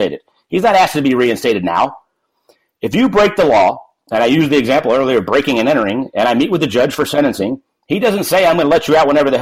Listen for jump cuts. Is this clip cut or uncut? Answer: uncut